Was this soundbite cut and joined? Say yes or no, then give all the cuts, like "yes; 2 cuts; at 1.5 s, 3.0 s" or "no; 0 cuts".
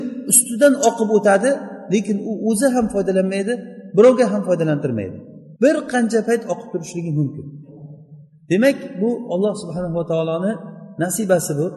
yes; 1 cut; at 5.6 s